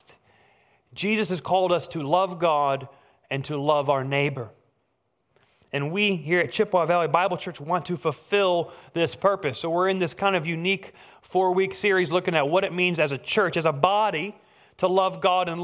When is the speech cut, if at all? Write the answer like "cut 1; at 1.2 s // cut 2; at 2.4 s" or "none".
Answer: none